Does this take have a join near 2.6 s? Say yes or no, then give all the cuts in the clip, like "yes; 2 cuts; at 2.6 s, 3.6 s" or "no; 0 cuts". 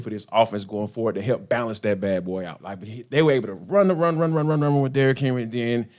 yes; 1 cut; at 2.6 s